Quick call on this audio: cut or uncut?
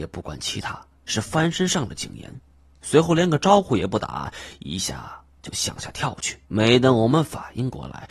cut